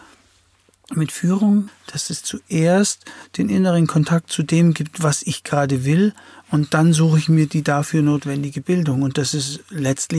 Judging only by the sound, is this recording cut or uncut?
cut